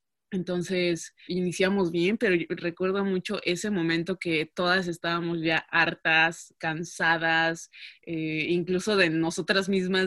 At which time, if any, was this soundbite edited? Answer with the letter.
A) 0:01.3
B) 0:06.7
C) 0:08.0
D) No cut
A